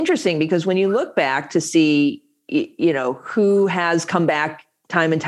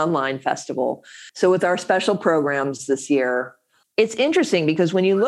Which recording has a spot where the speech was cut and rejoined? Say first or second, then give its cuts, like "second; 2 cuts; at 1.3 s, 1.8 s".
second; 2 cuts; at 1.3 s, 3.8 s